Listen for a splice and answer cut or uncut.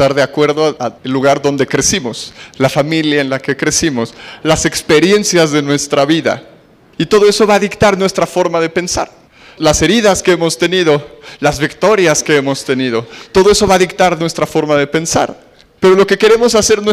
uncut